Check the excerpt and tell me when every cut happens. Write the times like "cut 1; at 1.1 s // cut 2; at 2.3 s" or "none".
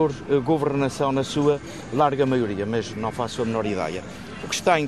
none